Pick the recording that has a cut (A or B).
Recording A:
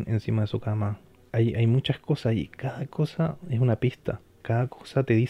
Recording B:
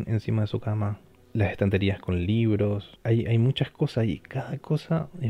A